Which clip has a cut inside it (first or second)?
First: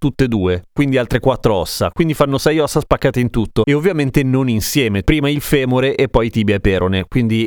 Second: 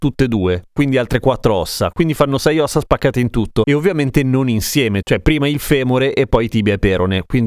first